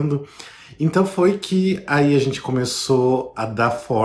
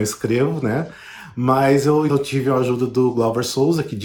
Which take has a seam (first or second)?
second